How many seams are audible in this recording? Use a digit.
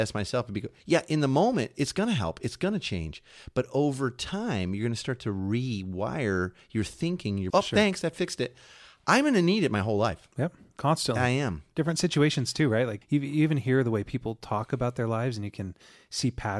2